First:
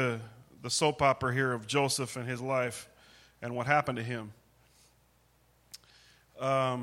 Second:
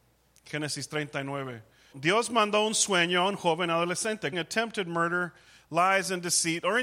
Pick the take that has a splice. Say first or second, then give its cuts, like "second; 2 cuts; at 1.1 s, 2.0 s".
second; 2 cuts; at 1.9 s, 4.3 s